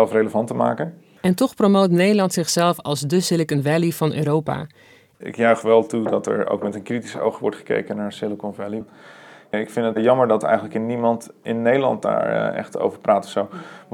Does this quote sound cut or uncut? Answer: cut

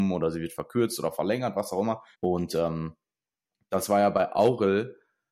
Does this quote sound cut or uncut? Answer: cut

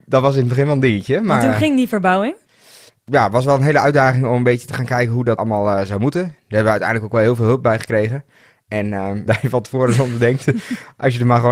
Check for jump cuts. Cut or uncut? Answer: cut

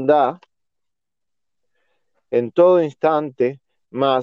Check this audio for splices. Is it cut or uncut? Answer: uncut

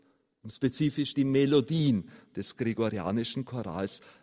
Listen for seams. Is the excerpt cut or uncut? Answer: cut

